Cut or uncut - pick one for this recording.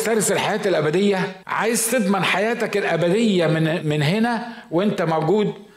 cut